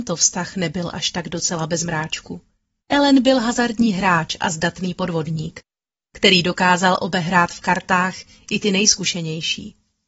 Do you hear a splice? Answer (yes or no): yes